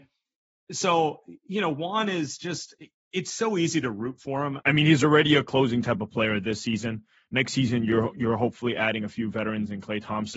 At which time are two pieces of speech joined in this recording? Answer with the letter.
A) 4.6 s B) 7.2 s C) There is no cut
A